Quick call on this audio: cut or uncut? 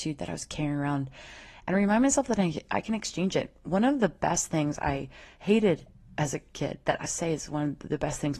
cut